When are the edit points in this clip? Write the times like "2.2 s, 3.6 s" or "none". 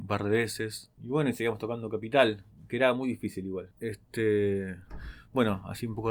1.0 s, 3.7 s